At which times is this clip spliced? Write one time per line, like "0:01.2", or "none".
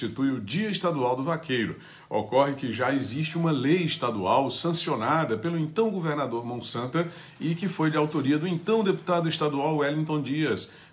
none

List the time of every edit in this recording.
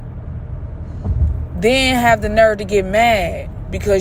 none

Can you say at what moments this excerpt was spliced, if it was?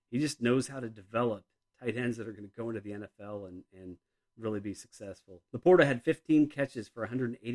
0:05.5

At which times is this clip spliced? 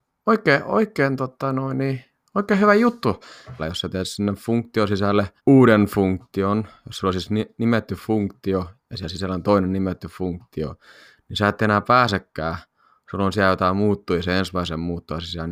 0:03.6
0:05.4

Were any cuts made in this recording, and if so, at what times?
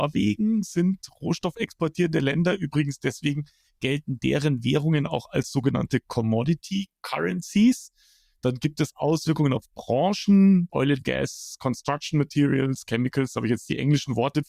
0:10.7

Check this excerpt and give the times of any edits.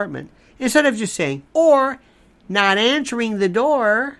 0:01.5

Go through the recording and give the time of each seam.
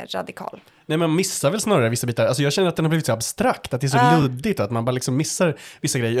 none

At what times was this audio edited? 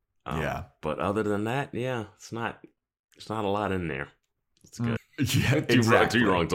0:05.0

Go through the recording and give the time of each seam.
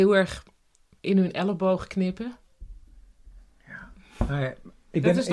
none

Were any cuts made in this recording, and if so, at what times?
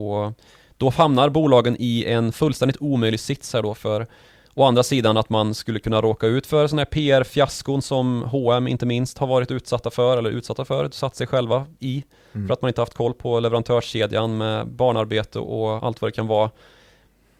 0:15.8

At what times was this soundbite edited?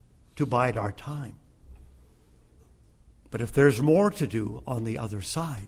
none

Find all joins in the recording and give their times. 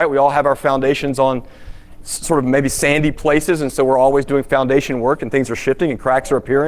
none

